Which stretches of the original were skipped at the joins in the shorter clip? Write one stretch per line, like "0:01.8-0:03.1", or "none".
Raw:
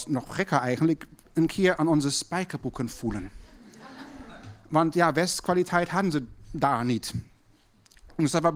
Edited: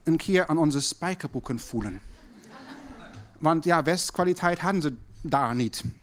none